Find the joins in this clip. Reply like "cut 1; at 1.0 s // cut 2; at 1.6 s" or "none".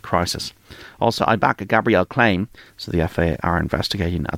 cut 1; at 1.2 s // cut 2; at 2.7 s